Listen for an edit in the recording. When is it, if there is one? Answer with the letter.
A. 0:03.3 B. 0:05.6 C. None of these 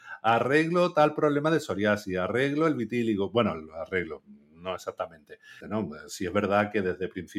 B